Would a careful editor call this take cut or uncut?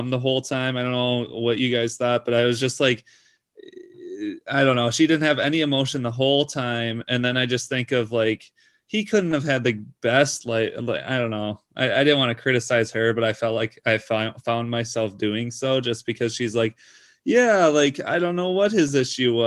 uncut